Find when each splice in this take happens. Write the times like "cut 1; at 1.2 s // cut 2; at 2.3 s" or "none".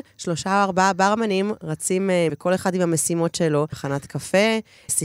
cut 1; at 2.3 s // cut 2; at 3.7 s